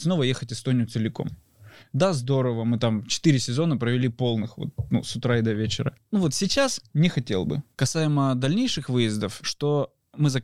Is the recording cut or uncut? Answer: cut